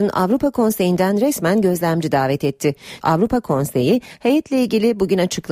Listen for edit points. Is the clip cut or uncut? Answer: cut